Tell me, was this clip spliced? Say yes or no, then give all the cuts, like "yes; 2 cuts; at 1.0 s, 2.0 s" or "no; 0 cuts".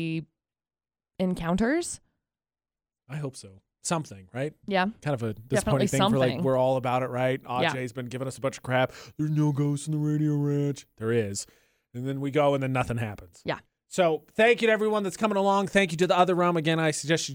no; 0 cuts